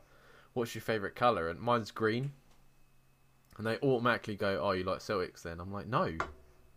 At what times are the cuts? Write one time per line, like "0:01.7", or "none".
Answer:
none